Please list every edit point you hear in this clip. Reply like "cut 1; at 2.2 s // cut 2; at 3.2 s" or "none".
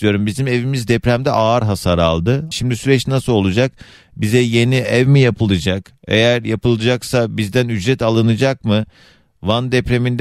cut 1; at 2.5 s